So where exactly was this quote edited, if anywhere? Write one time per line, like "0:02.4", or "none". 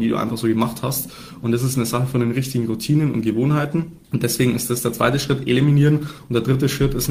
0:04.0